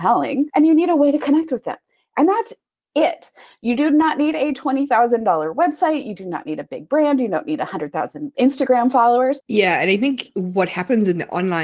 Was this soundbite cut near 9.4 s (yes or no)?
yes